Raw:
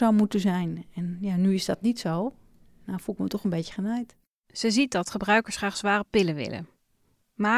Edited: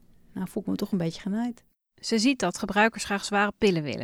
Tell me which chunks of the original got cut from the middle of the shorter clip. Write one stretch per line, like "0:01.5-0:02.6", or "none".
none